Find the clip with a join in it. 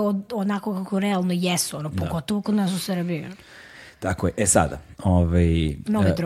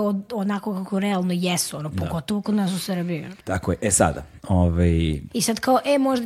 second; 2 cuts; at 3.4 s, 5.3 s

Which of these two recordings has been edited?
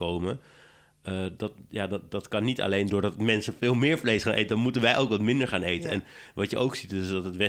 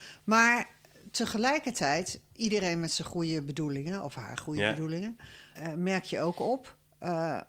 second; 1 cut; at 5.6 s

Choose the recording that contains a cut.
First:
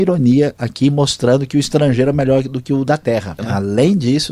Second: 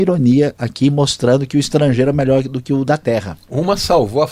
first; 1 cut; at 3.4 s

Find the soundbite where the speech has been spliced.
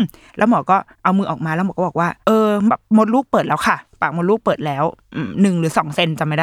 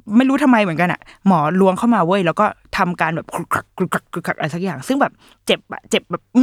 first; 2 cuts; at 0.9 s, 2.2 s

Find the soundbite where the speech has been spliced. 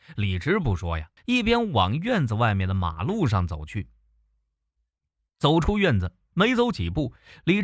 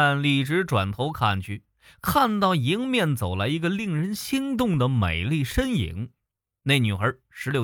first; 1 cut; at 1.2 s

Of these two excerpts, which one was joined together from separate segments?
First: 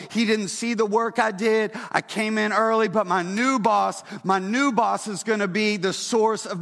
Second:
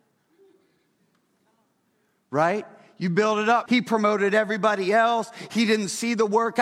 second; 1 cut; at 3.7 s

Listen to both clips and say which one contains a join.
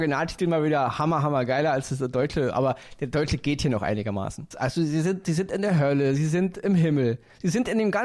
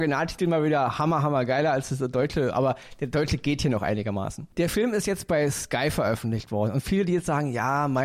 first; 1 cut; at 4.5 s

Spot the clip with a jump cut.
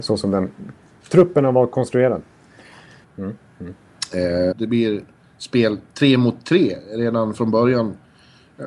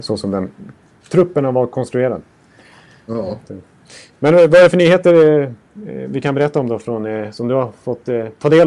first; 2 cuts; at 3.0 s, 4.5 s

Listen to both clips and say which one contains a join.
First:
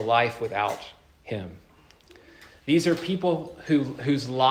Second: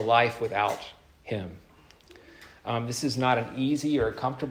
first; 1 cut; at 2.5 s

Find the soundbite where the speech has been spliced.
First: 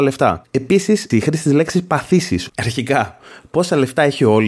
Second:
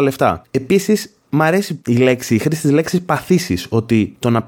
first; 2 cuts; at 1.1 s, 2.5 s

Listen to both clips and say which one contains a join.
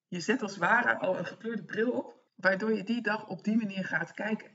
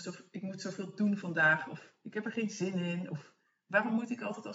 first; 1 cut; at 2.3 s

